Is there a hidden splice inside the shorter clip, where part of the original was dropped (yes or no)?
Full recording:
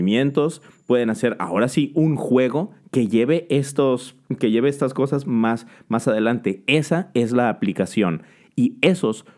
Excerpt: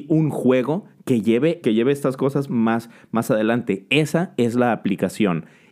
yes